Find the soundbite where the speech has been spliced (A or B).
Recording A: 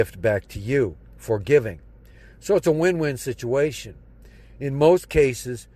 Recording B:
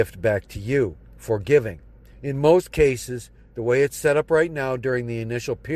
B